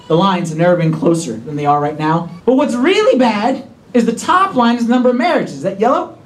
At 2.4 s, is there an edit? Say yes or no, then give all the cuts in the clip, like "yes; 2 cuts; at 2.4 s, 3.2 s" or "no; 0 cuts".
yes; 1 cut; at 2.4 s